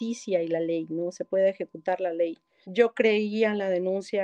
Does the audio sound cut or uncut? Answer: cut